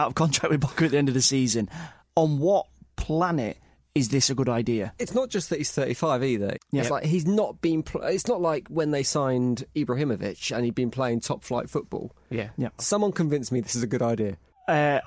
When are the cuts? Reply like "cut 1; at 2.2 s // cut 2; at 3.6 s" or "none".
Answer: cut 1; at 6.5 s // cut 2; at 12.8 s